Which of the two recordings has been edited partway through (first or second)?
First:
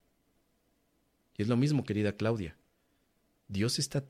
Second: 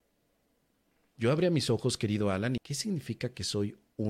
second